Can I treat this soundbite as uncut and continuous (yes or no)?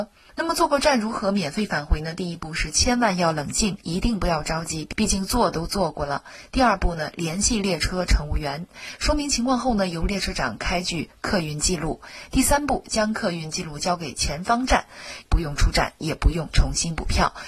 no